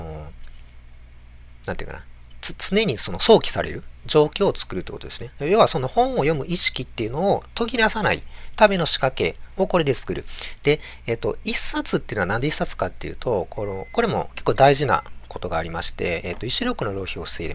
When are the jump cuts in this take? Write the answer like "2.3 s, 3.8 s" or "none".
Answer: none